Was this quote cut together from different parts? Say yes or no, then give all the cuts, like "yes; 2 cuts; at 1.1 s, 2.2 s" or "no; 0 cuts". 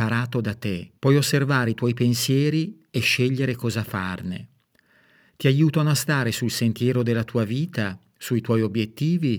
yes; 1 cut; at 1.0 s